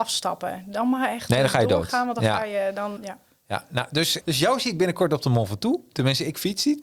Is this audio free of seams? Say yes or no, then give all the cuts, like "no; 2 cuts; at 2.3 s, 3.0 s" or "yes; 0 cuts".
no; 2 cuts; at 3.0 s, 4.2 s